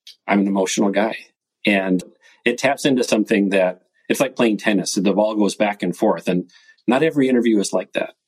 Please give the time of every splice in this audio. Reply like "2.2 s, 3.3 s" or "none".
2.0 s